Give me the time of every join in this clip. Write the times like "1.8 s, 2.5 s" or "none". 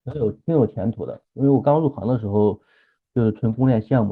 none